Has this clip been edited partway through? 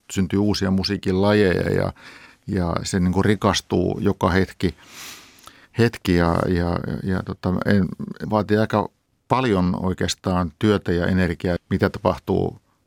yes; 3 cuts; at 2.8 s, 8.2 s, 11.6 s

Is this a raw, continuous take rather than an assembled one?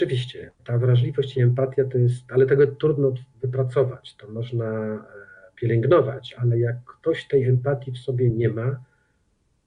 no; 1 cut; at 6.4 s

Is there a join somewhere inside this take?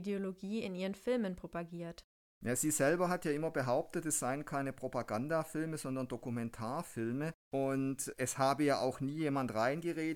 no; 0 cuts

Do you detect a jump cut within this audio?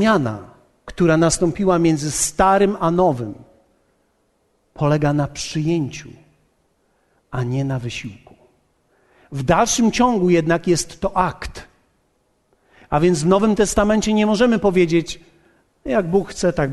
no; 0 cuts

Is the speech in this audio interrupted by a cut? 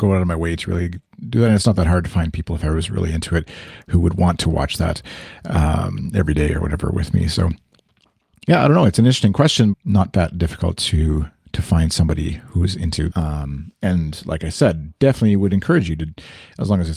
yes; 2 cuts; at 9.7 s, 13.1 s

